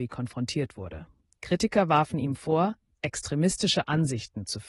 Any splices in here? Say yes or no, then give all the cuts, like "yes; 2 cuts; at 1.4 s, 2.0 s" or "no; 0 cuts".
no; 0 cuts